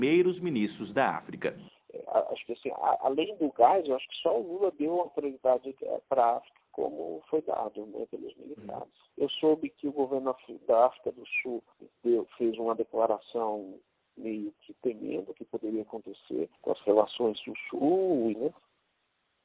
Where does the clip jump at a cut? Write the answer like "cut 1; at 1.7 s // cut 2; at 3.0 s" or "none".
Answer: cut 1; at 9.1 s // cut 2; at 16.5 s // cut 3; at 18.3 s